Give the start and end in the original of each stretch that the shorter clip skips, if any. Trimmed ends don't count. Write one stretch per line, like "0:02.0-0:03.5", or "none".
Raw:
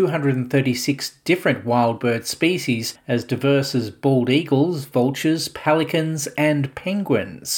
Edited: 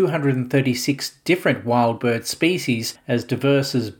none